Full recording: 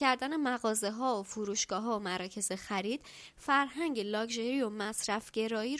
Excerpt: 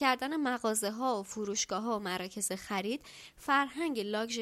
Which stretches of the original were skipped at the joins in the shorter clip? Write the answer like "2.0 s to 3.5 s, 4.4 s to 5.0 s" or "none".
none